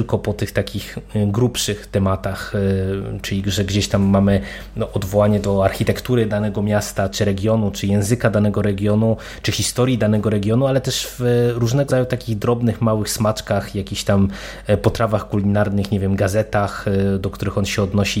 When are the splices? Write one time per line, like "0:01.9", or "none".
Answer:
0:07.1
0:11.9